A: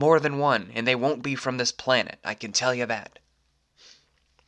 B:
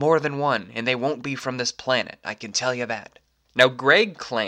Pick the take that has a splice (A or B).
B